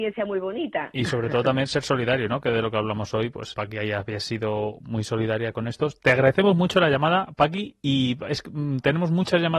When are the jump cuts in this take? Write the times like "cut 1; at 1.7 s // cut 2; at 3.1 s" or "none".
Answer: cut 1; at 3.5 s